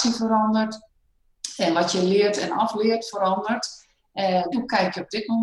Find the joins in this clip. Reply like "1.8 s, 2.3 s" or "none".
4.5 s